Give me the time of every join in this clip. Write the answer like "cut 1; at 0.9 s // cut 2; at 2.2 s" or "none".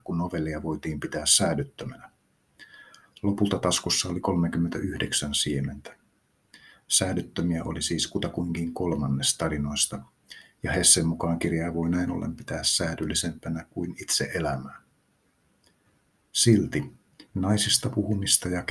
cut 1; at 17.3 s